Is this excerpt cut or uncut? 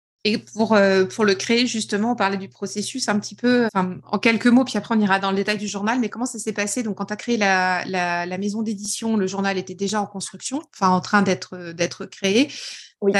cut